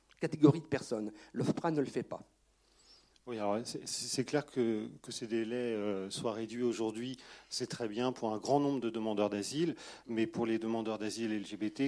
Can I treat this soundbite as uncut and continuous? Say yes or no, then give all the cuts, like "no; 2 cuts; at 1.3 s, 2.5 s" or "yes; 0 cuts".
yes; 0 cuts